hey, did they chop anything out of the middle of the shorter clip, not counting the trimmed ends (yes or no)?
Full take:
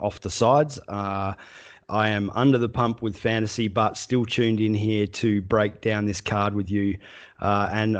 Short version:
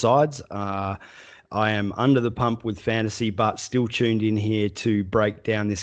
no